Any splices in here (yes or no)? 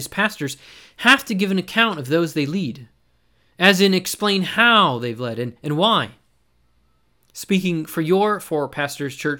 no